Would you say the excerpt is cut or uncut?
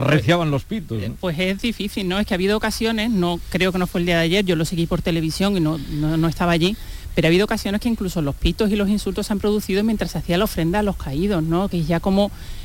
uncut